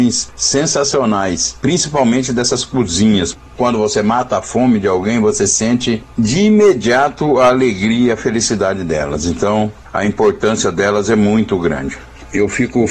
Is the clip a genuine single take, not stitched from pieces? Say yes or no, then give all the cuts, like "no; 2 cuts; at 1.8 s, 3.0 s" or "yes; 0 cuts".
yes; 0 cuts